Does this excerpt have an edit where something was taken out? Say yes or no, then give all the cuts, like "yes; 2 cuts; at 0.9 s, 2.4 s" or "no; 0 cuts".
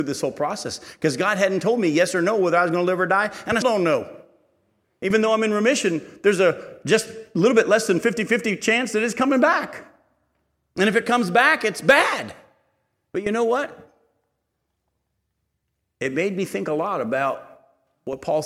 yes; 1 cut; at 3.6 s